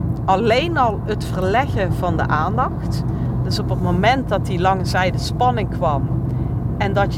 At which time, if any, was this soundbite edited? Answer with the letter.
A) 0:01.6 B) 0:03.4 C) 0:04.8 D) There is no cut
D